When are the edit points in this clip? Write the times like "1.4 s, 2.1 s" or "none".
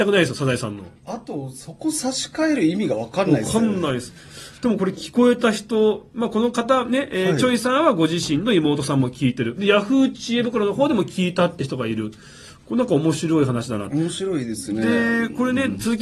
none